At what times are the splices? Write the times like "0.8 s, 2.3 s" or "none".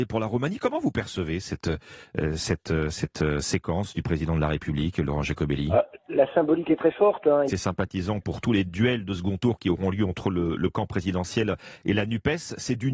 7.5 s

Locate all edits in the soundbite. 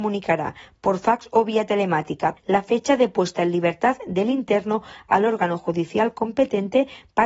2.4 s

